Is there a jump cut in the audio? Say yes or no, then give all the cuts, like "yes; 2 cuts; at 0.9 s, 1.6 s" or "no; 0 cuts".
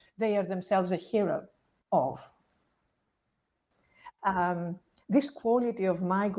yes; 1 cut; at 4.2 s